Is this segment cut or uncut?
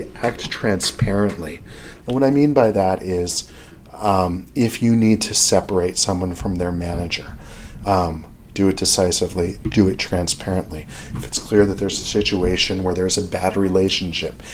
cut